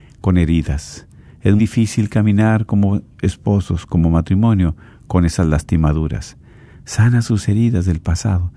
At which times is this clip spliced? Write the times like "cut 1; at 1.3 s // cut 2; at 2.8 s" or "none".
cut 1; at 1.6 s